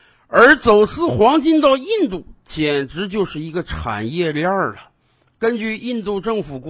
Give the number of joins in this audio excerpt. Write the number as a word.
zero